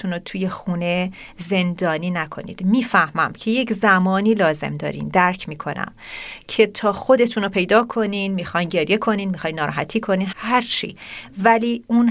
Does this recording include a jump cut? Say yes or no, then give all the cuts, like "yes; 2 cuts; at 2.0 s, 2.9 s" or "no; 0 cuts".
yes; 1 cut; at 10.3 s